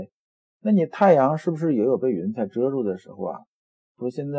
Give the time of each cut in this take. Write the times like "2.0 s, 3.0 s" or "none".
none

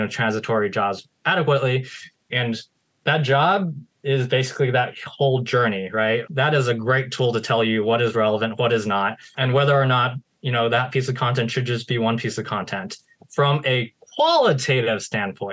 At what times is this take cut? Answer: 2.3 s, 6.3 s, 9.3 s

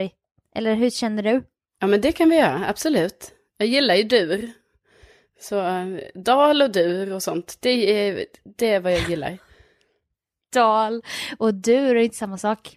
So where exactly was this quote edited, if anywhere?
none

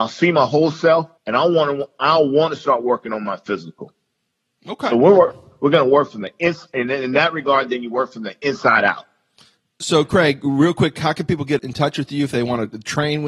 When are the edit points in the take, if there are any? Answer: 1.2 s, 11.6 s

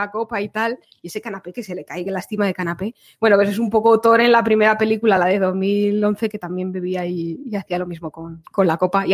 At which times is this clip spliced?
none

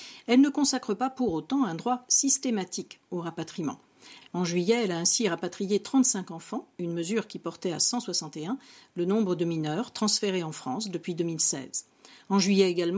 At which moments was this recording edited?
4.3 s

